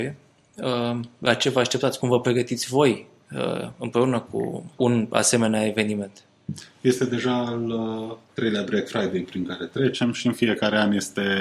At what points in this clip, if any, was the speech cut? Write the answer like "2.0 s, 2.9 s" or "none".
4.8 s

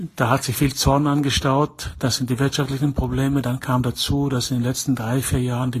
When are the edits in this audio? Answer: none

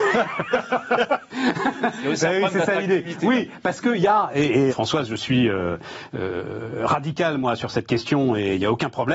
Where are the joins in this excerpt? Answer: 4.7 s

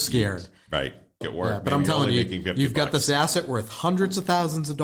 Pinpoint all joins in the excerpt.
1.2 s

